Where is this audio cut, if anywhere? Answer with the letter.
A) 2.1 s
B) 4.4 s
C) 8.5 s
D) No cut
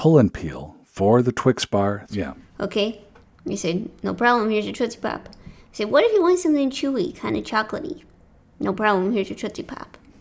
A